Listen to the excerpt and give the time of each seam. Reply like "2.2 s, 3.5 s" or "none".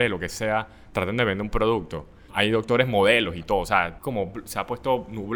2.3 s, 4.0 s